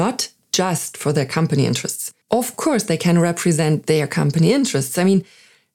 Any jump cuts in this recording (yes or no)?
yes